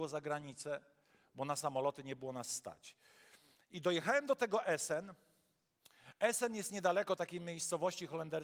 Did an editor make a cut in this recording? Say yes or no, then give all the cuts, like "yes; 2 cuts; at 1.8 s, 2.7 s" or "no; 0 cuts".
no; 0 cuts